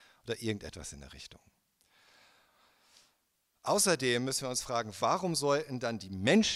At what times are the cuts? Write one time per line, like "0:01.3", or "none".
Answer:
none